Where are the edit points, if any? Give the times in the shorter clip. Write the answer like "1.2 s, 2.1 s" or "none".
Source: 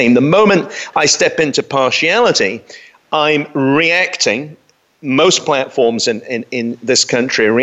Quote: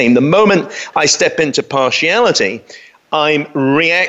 none